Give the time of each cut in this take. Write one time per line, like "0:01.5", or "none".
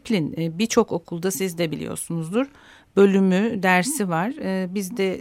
none